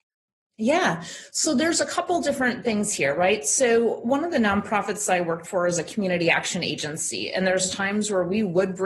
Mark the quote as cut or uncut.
uncut